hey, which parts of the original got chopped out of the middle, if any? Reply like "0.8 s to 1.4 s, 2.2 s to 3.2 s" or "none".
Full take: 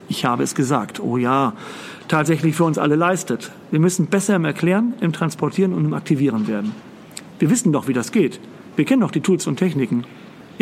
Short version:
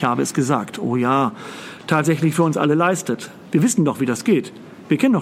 3.7 s to 7.3 s